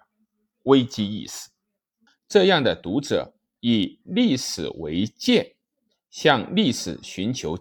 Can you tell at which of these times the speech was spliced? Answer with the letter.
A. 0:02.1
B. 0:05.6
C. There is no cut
A